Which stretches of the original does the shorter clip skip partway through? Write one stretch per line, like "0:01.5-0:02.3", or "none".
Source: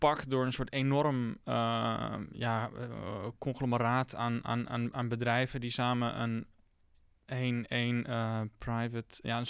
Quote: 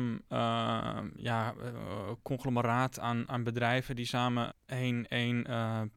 0:04.4-0:04.9
0:06.1-0:07.1

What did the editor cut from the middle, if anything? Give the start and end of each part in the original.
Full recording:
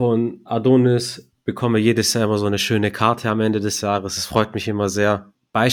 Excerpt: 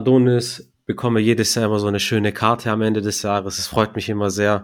none

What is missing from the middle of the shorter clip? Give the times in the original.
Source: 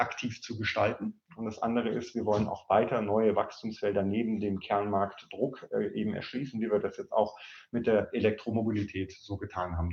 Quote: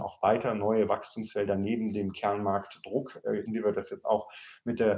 0:05.9-0:06.5

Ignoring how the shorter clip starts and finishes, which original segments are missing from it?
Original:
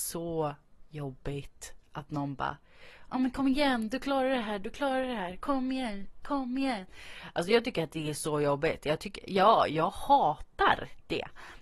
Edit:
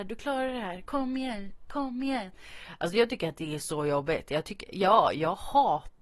none

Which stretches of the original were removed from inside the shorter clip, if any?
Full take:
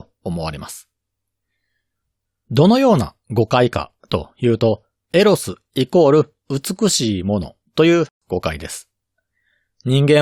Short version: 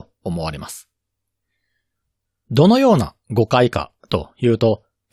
none

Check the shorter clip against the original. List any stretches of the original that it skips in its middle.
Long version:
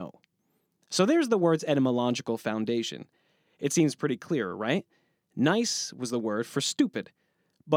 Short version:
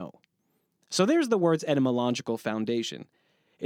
none

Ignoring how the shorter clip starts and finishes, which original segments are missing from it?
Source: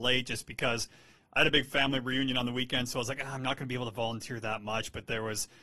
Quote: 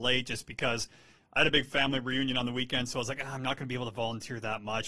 none

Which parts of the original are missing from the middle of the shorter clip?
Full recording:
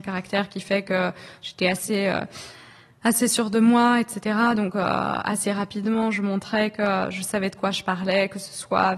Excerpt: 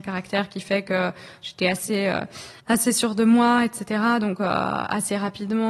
0:02.6-0:03.0

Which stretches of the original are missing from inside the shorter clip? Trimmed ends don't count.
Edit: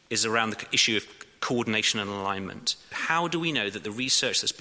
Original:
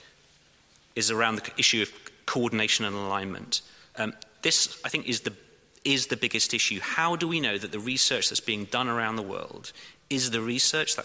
0:03.8-0:06.8

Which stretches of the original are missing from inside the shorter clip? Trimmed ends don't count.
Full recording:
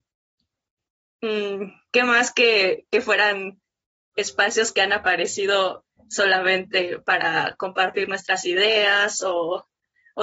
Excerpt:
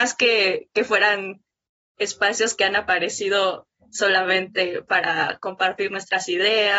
none

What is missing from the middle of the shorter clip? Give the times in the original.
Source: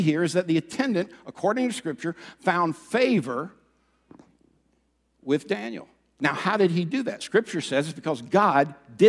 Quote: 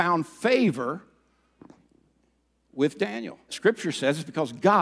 0:06.0-0:07.2

